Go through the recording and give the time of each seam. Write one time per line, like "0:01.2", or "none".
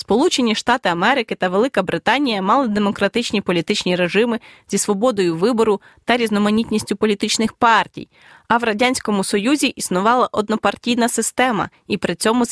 none